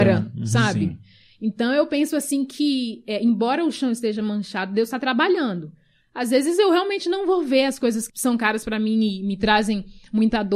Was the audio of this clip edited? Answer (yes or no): yes